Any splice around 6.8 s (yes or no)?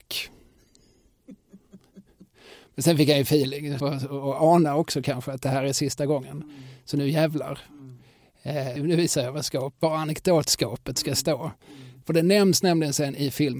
no